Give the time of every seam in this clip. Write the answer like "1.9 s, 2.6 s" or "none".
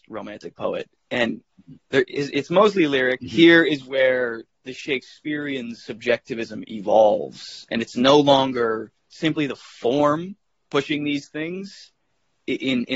3.2 s, 4.5 s, 9.0 s